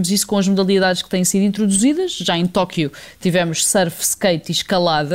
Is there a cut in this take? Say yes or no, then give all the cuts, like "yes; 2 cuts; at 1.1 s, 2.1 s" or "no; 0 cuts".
no; 0 cuts